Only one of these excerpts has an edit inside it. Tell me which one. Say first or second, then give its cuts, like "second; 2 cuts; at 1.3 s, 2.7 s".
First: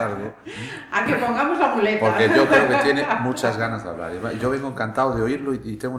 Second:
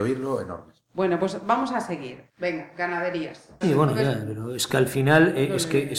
second; 2 cuts; at 2.3 s, 3.6 s